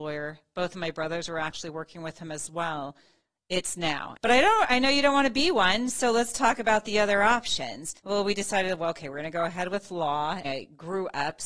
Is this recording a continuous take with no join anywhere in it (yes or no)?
no